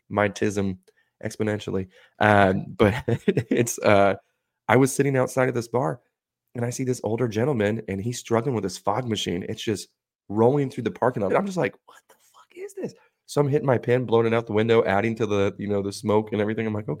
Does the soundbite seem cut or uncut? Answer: cut